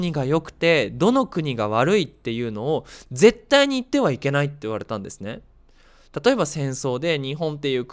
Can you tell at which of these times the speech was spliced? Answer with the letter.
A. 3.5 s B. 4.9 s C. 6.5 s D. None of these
D